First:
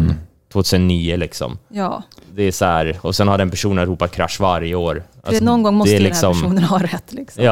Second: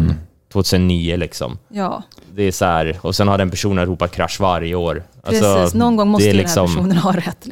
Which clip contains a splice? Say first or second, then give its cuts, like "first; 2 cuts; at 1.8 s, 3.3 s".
first; 1 cut; at 5.4 s